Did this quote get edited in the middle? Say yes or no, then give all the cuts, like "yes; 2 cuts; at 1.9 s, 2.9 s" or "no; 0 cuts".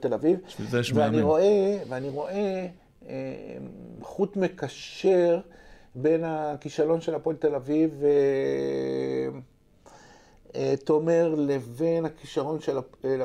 no; 0 cuts